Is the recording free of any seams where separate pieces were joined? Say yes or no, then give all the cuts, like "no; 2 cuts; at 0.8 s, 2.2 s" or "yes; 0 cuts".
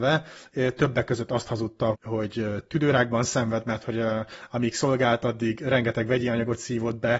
no; 1 cut; at 1.9 s